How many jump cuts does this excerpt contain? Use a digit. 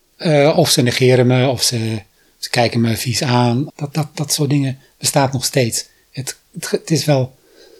1